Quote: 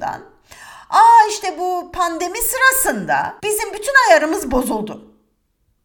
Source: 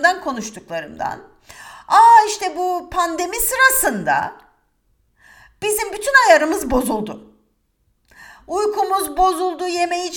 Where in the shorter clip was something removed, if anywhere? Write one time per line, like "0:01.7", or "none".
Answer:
0:03.4

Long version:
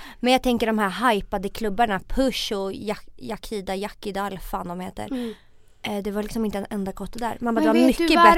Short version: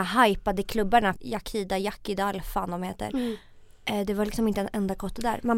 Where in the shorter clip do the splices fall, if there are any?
0:01.1

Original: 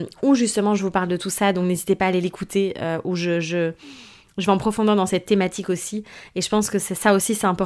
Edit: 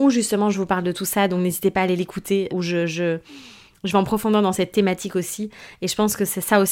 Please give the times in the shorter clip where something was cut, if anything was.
0:02.5

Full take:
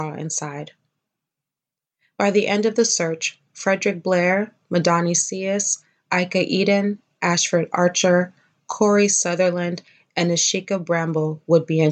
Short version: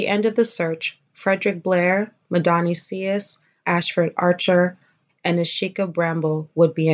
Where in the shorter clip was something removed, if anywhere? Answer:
0:03.6
0:05.1

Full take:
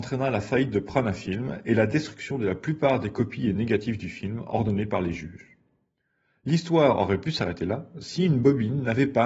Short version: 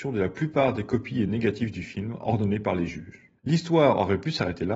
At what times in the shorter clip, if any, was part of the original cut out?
0:03.4

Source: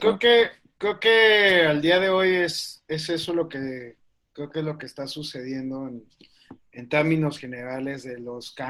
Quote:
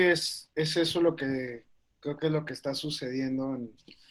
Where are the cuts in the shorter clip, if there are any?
none

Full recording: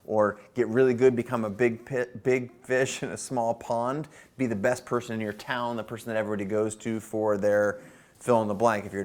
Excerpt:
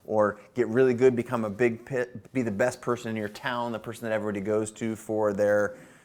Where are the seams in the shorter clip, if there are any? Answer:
0:02.2

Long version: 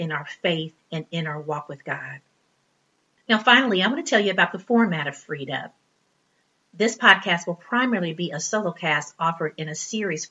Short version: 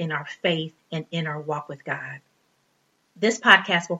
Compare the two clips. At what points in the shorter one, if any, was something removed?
0:03.0

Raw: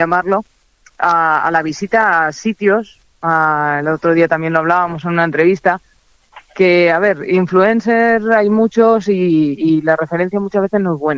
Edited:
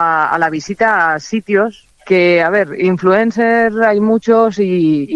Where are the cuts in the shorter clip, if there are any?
0:02.0

